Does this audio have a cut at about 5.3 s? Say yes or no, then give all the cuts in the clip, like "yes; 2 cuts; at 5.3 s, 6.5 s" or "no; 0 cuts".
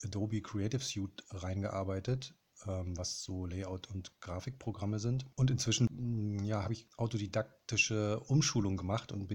yes; 1 cut; at 5.3 s